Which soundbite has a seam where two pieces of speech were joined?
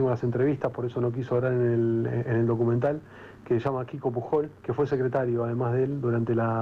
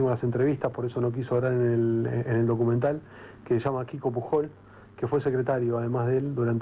first; 1 cut; at 4.6 s

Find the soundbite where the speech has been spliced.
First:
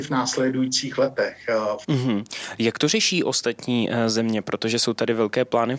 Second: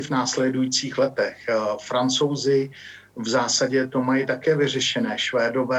first; 1 cut; at 1.8 s

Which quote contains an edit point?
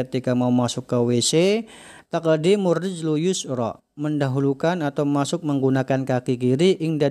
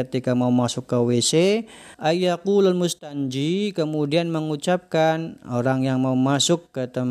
second; 1 cut; at 1.9 s

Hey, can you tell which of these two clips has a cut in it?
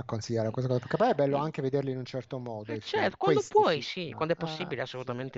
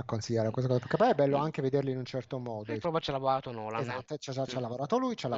second; 1 cut; at 2.8 s

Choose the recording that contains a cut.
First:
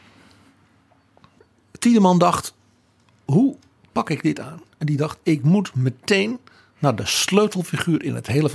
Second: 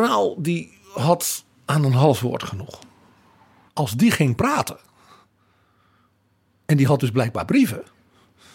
second; 1 cut; at 3.7 s

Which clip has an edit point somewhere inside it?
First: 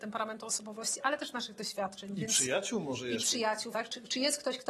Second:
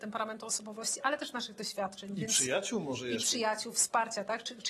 first; 1 cut; at 3.7 s

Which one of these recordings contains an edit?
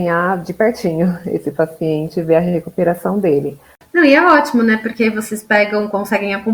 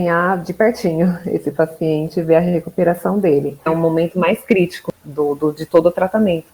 second; 1 cut; at 3.7 s

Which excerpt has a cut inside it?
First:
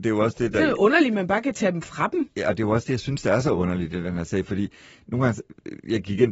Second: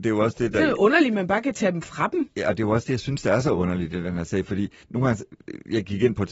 second; 1 cut; at 4.8 s

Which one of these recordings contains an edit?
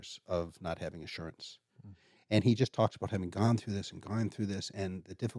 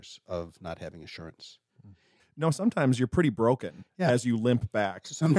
second; 1 cut; at 2.2 s

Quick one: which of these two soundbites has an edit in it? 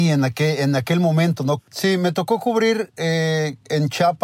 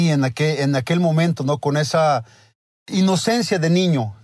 first; 1 cut; at 1.6 s

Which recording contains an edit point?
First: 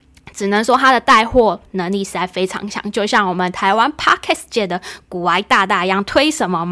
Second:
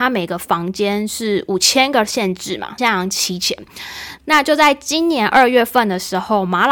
second; 2 cuts; at 2.8 s, 4.2 s

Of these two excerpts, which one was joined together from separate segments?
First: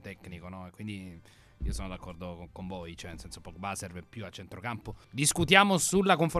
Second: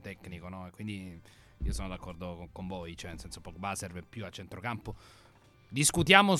first; 1 cut; at 5.0 s

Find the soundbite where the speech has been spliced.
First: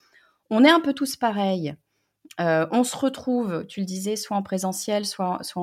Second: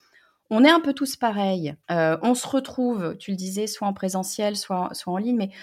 second; 1 cut; at 1.8 s

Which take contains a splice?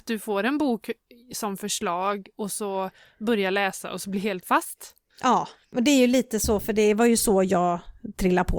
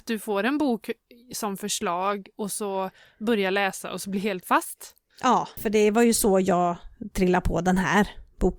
second; 1 cut; at 5.6 s

